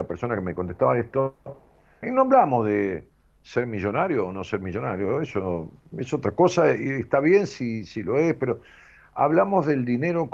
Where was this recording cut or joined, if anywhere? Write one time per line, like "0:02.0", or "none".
0:02.0